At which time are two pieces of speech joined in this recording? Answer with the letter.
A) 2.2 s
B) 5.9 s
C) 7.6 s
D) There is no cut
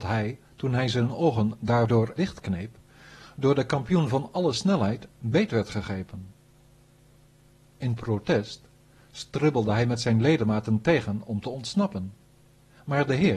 A